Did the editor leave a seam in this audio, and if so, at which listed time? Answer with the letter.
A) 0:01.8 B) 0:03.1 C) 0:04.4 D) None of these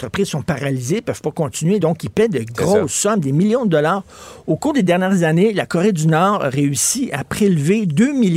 D